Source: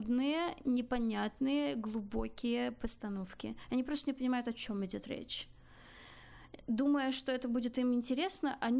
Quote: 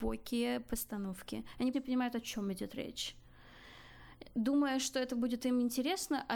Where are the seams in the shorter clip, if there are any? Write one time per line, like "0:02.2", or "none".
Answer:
0:01.7